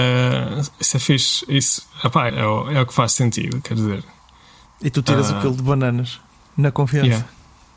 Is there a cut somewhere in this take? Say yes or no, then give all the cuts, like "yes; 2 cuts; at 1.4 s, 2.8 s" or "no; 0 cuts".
yes; 2 cuts; at 2.3 s, 4.7 s